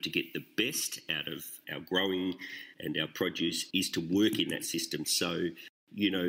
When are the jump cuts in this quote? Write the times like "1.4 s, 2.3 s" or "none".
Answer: 5.0 s